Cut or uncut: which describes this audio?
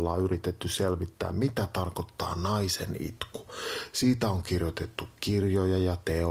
uncut